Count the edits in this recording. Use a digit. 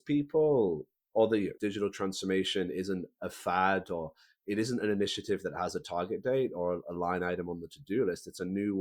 1